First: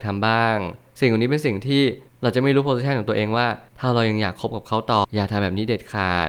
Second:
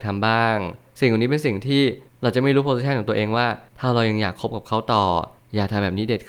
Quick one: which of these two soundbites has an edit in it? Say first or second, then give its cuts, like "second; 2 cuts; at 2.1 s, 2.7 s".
first; 1 cut; at 5.0 s